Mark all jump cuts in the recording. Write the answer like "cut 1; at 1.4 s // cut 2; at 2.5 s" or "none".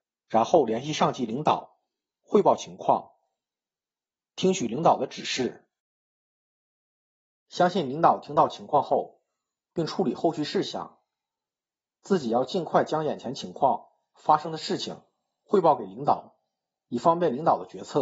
cut 1; at 9.6 s